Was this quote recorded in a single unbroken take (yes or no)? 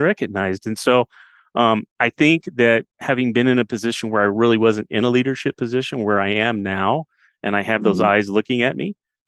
yes